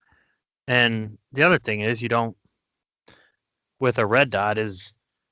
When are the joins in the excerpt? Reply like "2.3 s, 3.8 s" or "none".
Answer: none